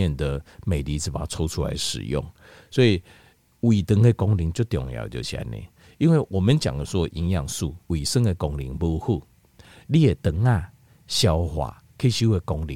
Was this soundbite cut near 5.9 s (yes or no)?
no